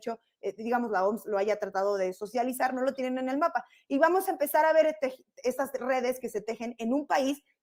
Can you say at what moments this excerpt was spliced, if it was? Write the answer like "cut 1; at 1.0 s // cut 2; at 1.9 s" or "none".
none